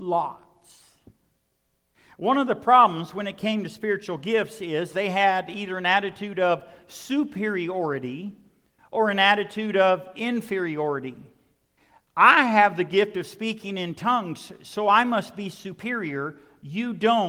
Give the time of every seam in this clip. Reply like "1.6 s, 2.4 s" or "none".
none